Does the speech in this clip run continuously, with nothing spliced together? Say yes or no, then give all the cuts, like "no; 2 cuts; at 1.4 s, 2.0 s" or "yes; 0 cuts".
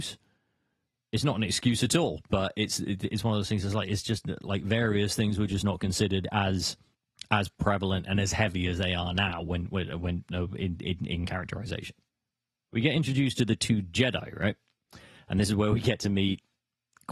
yes; 0 cuts